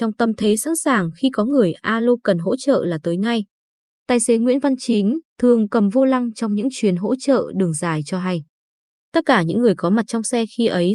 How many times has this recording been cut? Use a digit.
1